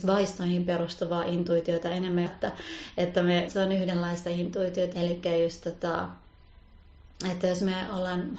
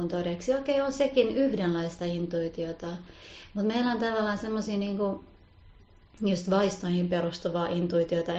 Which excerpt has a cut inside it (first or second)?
first